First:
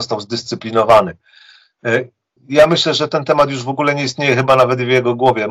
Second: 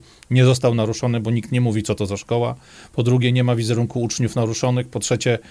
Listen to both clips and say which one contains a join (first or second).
first